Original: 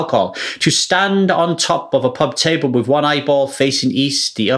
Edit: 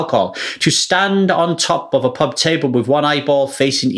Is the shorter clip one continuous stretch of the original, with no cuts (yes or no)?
yes